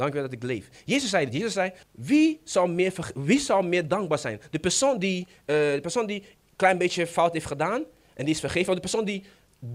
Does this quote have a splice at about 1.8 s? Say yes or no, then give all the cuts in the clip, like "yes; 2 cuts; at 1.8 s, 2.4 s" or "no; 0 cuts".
yes; 1 cut; at 1.8 s